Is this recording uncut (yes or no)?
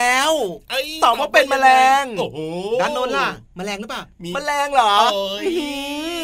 no